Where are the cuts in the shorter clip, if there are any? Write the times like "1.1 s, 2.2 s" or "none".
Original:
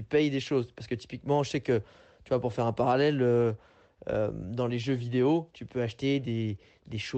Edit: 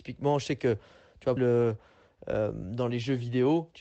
1.4 s